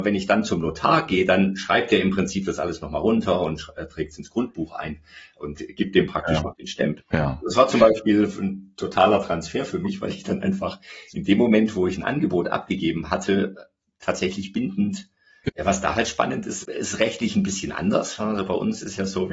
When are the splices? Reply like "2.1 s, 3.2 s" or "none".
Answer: 7.0 s, 15.5 s, 16.6 s